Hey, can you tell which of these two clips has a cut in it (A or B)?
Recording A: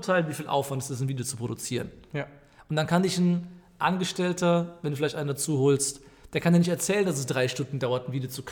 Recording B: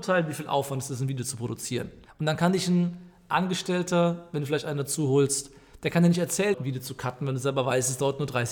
B